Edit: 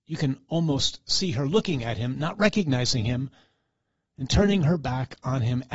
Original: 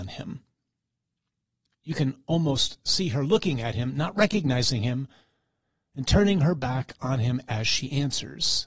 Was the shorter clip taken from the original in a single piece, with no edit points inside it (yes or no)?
yes